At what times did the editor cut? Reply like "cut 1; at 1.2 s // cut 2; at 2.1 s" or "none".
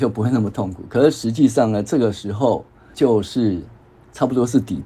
cut 1; at 2.9 s